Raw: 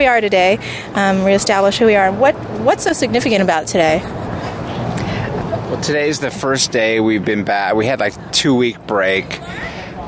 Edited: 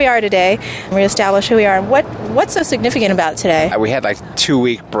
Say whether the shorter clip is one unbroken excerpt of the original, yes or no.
no